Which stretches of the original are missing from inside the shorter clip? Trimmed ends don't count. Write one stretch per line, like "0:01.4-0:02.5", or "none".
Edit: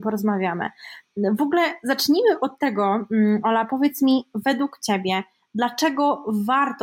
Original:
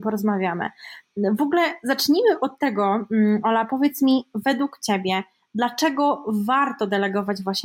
none